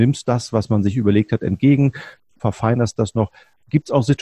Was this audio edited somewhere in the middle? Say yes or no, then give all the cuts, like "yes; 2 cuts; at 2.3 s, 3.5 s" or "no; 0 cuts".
yes; 1 cut; at 2.4 s